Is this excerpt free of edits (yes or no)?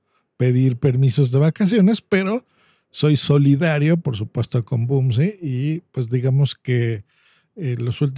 yes